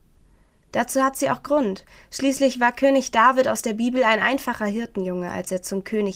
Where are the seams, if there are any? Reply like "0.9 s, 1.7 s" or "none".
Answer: none